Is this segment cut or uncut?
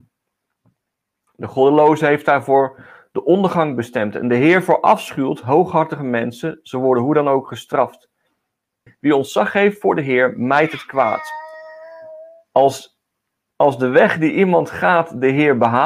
cut